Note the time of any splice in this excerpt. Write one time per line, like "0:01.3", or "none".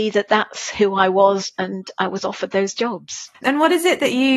0:03.3